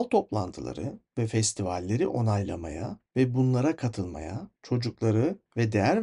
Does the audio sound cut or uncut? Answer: cut